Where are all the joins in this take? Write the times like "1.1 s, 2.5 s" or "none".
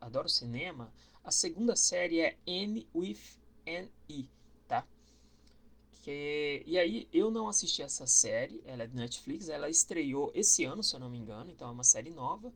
none